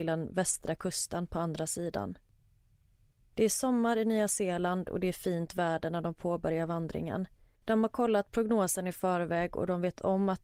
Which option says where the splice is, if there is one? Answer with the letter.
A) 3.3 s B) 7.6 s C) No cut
B